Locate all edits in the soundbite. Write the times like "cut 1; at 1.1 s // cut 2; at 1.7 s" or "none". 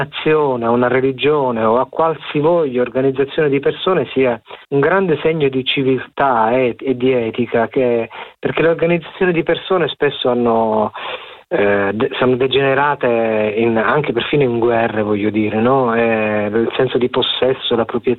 cut 1; at 4.6 s